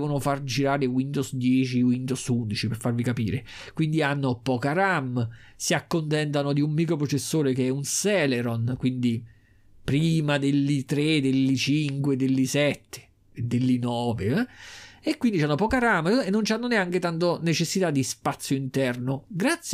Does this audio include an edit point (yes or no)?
no